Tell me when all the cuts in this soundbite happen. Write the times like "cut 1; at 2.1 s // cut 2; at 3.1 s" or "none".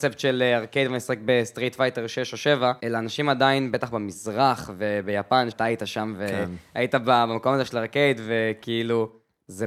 cut 1; at 2.8 s // cut 2; at 5.5 s